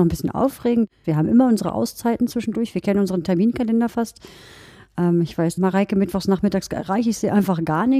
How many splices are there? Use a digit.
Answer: 2